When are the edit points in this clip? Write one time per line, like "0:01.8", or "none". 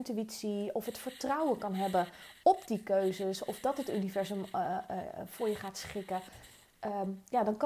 none